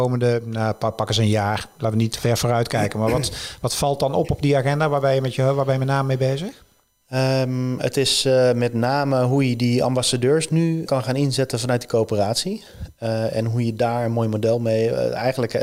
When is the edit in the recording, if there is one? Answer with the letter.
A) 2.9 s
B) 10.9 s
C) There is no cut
B